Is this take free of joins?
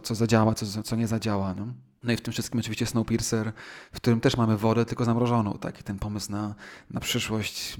yes; 0 cuts

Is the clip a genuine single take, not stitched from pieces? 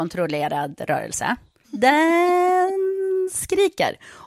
no; 1 cut; at 1.6 s

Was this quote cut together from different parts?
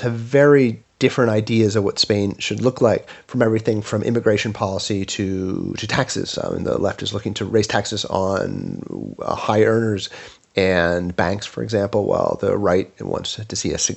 no; 0 cuts

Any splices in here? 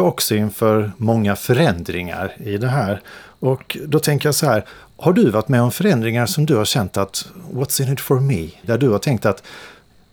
yes; 1 cut; at 8.6 s

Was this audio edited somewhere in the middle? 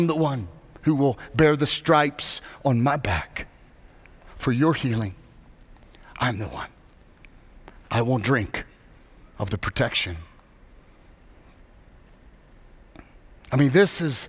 no; 0 cuts

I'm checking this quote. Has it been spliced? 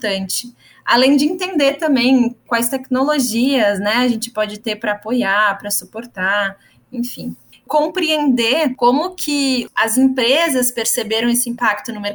yes; 1 cut; at 7.5 s

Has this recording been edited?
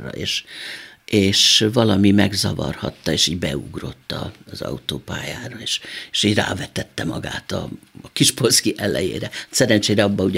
no; 0 cuts

